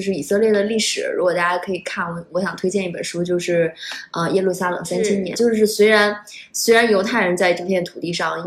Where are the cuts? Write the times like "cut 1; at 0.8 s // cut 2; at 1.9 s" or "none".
cut 1; at 5.3 s